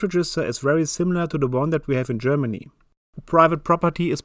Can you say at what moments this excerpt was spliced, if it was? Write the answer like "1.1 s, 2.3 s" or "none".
none